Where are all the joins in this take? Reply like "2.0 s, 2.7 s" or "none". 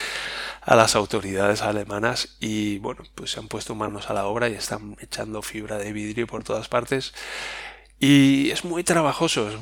none